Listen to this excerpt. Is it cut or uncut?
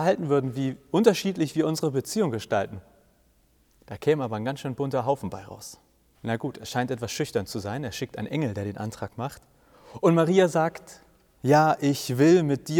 cut